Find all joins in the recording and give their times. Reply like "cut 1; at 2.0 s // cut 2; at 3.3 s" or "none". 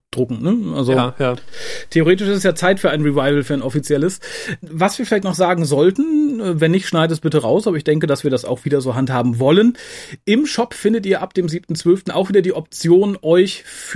none